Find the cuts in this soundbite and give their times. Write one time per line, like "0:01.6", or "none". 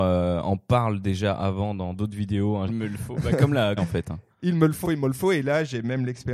0:02.7
0:03.8
0:04.8